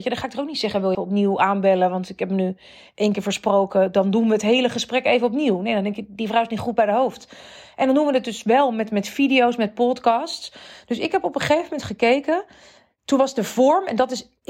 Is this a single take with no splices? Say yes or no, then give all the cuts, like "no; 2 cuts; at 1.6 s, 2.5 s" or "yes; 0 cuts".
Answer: no; 1 cut; at 0.9 s